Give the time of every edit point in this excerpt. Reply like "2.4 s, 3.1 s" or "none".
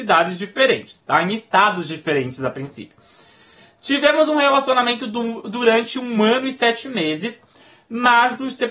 none